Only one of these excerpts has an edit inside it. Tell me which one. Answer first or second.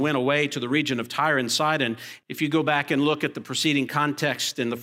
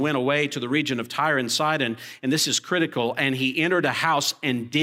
first